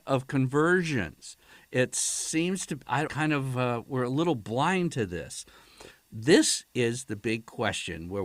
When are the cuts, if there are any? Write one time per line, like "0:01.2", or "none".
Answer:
0:03.1
0:05.9

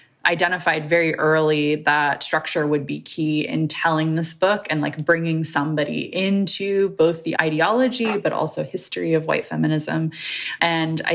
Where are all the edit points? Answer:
none

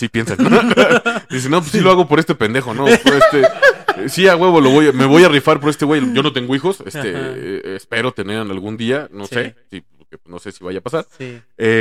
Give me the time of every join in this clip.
none

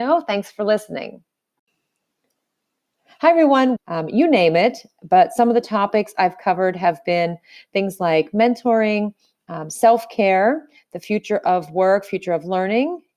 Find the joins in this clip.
0:03.8

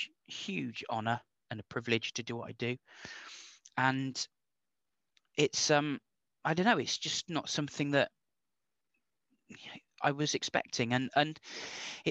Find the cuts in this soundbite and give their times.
none

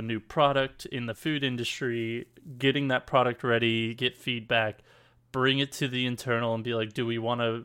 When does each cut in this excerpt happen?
0:04.0

